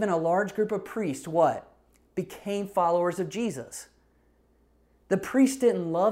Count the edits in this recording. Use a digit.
0